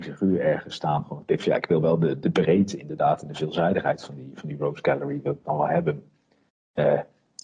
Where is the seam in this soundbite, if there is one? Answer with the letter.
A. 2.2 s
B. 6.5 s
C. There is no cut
A